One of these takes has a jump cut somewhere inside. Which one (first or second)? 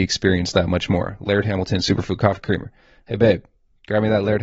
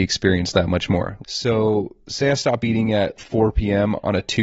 second